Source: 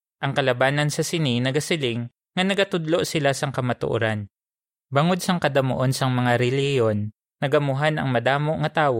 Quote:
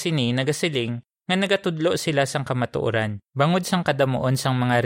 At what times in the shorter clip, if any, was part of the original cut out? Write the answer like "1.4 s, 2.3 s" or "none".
3.2 s